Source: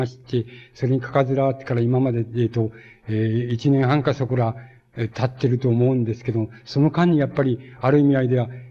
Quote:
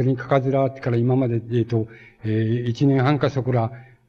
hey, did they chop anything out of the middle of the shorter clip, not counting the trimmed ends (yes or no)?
no